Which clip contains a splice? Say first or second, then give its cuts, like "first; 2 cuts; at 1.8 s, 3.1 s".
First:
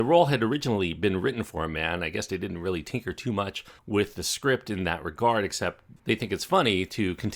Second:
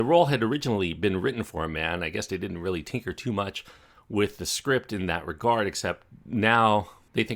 first; 2 cuts; at 3.8 s, 6.0 s